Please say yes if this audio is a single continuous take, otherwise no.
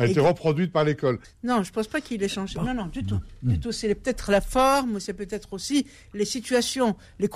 no